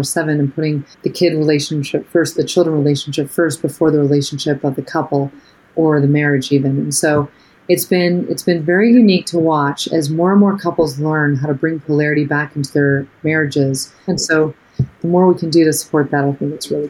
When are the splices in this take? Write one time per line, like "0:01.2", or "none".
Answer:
0:00.9
0:14.1